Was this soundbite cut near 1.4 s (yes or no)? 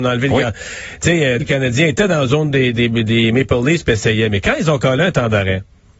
yes